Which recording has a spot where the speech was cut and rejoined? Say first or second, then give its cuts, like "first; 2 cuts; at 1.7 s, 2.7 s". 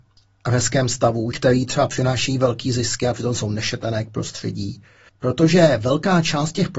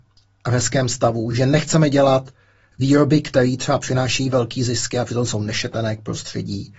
first; 2 cuts; at 1.3 s, 5.1 s